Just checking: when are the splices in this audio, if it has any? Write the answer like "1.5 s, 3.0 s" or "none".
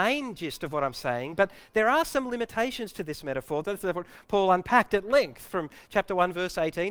3.6 s

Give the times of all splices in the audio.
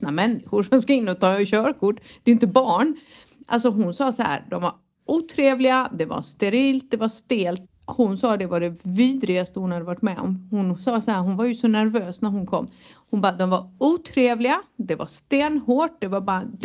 7.6 s

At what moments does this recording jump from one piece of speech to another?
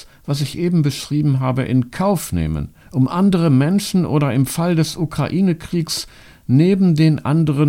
2.8 s

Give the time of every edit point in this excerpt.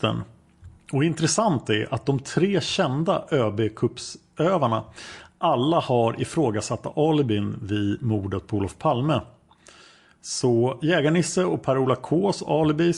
none

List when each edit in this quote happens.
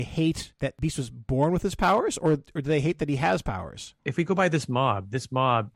none

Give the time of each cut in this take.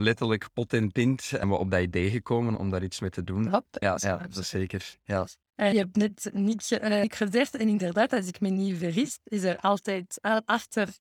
2.5 s, 3.8 s

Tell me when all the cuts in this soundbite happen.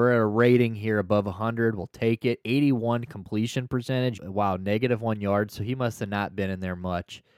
4.2 s

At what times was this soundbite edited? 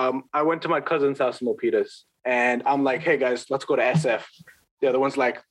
2.1 s

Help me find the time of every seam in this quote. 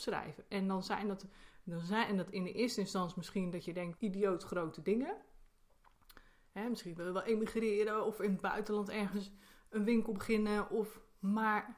4.0 s

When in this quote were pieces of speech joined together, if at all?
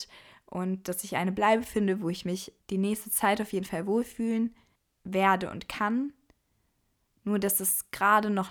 2.6 s

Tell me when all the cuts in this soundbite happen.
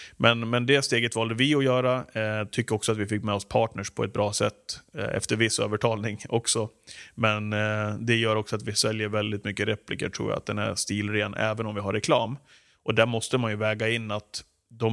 none

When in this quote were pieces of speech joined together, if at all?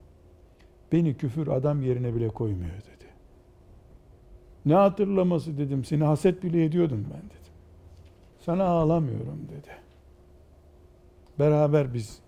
4.5 s, 8.3 s

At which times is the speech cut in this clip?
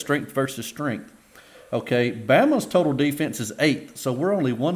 none

